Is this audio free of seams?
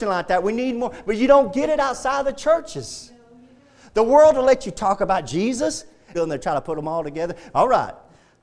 no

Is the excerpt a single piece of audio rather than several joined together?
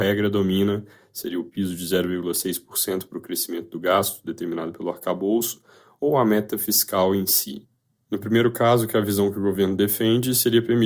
yes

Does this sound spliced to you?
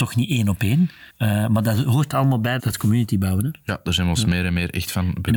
yes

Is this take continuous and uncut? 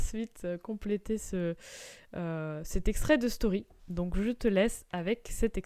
yes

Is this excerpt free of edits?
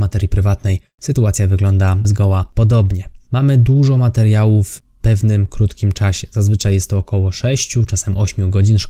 yes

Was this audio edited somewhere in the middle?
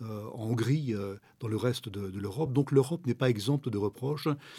no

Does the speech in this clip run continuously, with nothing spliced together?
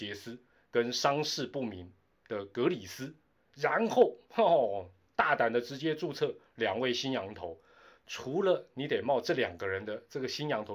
yes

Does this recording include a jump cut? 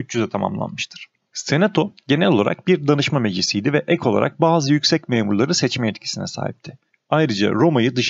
no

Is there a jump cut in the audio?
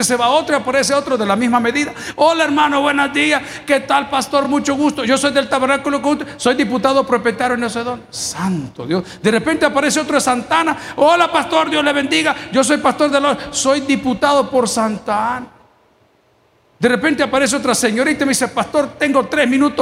no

